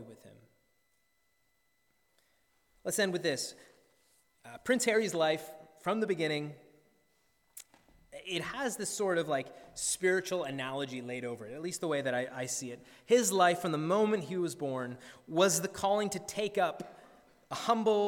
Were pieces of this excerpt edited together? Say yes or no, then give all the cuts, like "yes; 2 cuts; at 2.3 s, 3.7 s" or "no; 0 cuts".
no; 0 cuts